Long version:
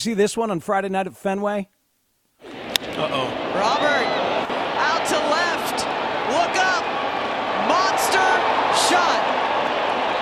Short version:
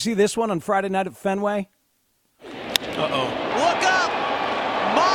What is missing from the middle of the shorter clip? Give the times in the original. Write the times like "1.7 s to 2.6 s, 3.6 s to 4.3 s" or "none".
3.5 s to 6.2 s